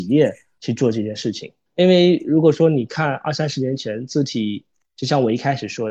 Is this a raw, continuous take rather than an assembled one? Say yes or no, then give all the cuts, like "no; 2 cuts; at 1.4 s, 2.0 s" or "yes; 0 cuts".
no; 1 cut; at 1.6 s